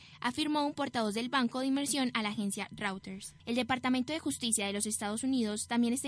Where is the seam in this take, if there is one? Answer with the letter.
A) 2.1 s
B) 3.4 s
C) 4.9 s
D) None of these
B